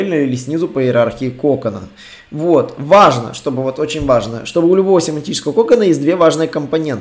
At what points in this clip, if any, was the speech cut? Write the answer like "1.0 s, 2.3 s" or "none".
none